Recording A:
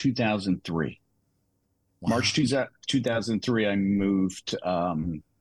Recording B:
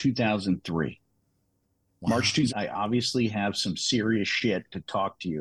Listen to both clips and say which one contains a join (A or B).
B